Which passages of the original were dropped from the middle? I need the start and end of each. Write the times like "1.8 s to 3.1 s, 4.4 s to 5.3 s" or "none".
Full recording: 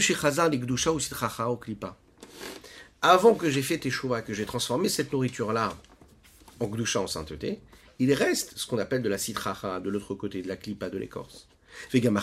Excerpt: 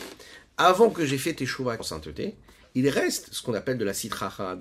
4.2 s to 7.0 s